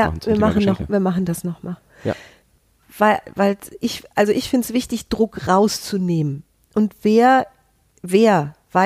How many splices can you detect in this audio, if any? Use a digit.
0